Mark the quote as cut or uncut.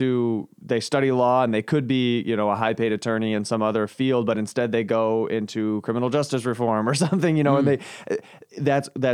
uncut